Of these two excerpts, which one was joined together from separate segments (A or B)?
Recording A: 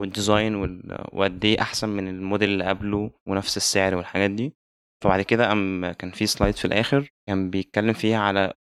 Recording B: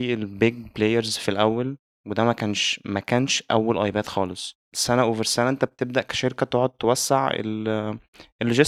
A